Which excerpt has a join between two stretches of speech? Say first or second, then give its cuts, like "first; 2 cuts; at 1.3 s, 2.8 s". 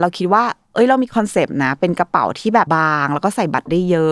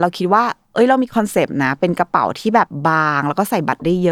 first; 1 cut; at 2.7 s